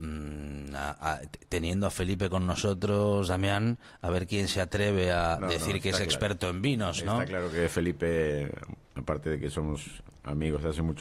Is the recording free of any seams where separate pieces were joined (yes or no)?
yes